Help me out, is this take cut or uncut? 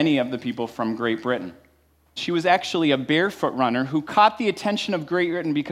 cut